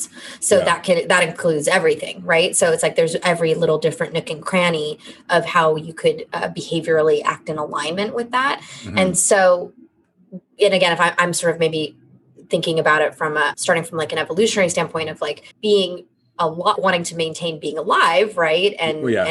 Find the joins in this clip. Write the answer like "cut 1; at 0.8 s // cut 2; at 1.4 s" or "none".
cut 1; at 13.5 s // cut 2; at 15.5 s // cut 3; at 16.8 s